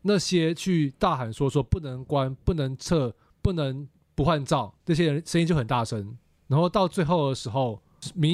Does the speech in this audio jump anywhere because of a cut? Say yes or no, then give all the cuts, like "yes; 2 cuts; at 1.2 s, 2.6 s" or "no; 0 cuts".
no; 0 cuts